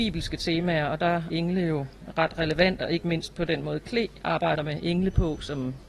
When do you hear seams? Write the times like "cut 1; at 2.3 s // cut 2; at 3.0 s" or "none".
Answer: cut 1; at 1.3 s